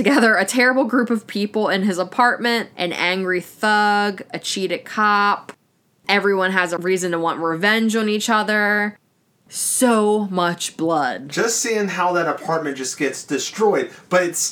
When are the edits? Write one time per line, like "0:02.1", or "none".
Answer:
0:02.7